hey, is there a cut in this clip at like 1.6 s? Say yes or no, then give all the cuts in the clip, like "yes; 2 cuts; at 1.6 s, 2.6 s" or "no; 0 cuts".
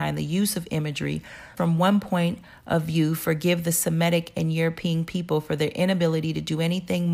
yes; 1 cut; at 1.6 s